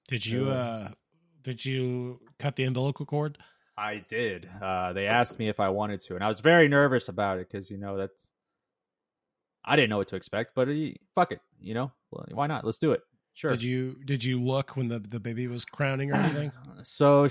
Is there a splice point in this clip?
no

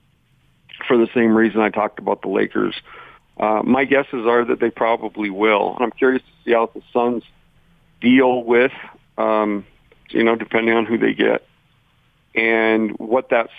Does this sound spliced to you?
yes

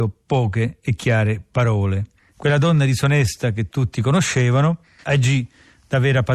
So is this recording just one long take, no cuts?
no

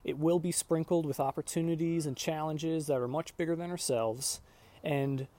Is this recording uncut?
yes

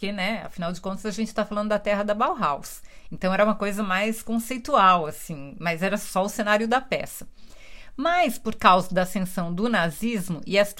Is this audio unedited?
yes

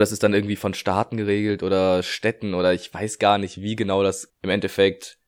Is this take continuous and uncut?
no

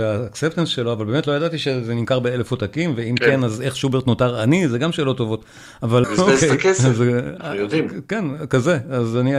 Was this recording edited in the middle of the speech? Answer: yes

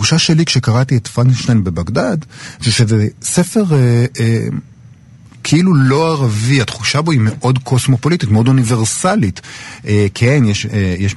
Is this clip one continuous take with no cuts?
yes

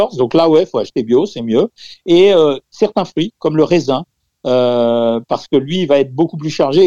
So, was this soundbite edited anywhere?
no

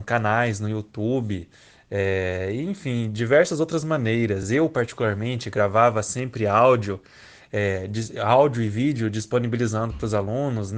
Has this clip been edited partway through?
no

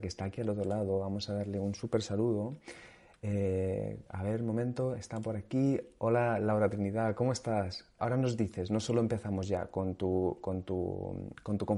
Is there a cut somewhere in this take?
yes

